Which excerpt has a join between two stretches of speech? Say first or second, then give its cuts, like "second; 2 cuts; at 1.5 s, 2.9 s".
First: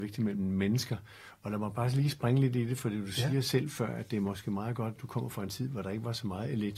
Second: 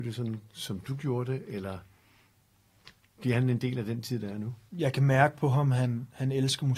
second; 1 cut; at 4.7 s